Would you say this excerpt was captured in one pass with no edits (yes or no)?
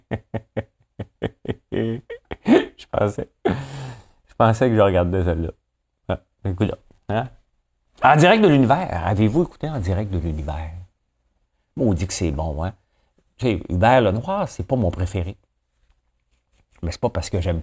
yes